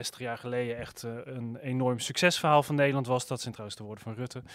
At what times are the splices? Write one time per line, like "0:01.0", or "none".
none